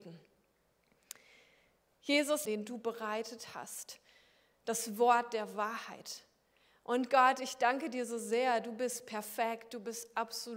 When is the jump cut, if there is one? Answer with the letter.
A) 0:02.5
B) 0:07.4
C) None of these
A